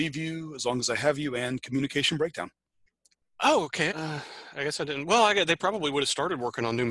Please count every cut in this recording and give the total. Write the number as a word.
one